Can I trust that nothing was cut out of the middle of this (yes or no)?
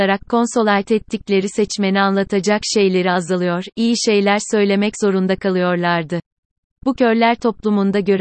no